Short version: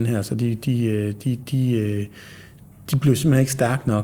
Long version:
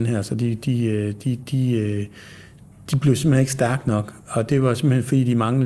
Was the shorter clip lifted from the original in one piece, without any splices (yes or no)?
yes